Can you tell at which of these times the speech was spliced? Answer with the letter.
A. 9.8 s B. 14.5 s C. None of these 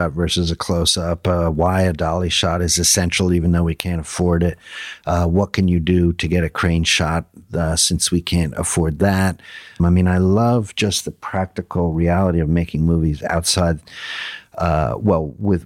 A